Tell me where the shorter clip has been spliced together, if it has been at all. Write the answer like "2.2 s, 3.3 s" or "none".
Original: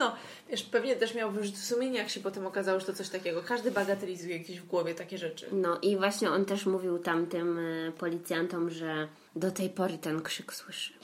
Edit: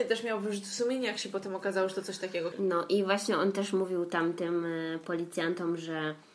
2.5 s